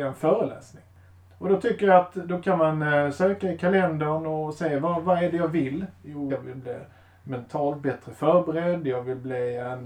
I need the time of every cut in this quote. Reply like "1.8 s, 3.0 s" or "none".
6.3 s